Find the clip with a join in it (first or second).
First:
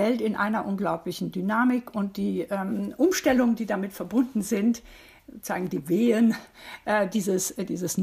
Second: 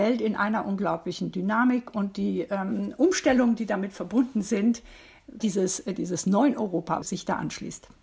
second